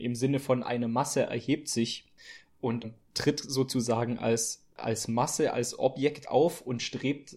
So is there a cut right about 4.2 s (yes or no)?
no